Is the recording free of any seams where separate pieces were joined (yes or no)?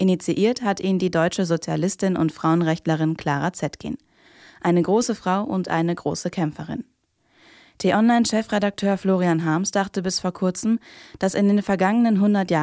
yes